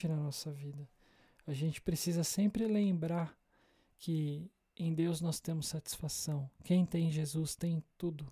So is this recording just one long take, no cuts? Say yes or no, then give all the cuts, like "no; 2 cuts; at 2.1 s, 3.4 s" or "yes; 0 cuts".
yes; 0 cuts